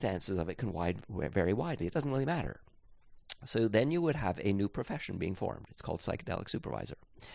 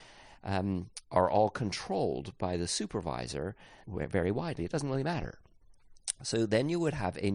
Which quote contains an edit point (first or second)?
second